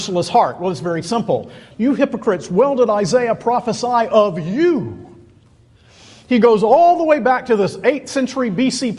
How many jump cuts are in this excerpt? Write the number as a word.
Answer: one